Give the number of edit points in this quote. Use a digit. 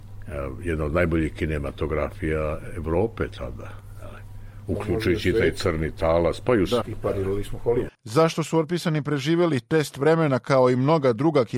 2